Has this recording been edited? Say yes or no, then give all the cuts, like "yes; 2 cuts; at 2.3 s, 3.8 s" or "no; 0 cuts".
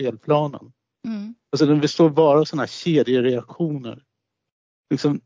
no; 0 cuts